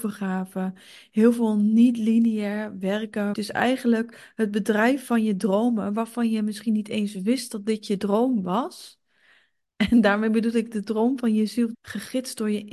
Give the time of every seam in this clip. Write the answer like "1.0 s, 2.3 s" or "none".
3.3 s, 11.7 s